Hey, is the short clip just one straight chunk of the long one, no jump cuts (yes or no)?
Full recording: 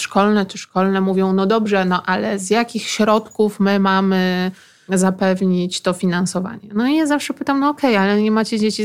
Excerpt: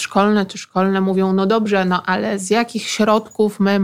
yes